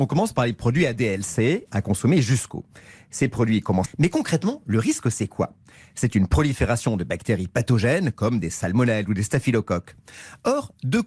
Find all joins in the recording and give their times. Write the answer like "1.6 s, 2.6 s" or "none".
3.9 s